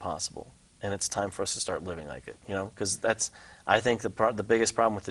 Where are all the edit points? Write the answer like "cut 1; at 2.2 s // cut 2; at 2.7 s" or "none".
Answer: cut 1; at 2.4 s